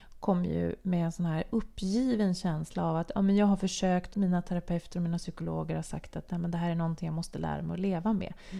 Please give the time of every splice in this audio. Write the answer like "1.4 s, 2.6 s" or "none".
4.1 s